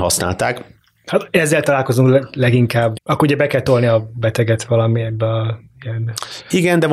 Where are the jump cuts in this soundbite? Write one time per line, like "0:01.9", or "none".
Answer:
0:02.9